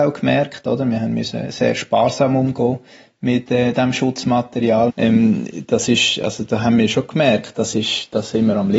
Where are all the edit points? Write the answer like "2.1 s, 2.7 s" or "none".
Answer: 4.9 s